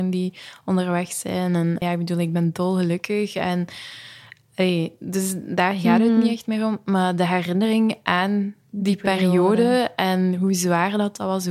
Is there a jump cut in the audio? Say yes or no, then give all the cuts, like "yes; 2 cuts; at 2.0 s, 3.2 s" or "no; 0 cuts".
yes; 1 cut; at 1.8 s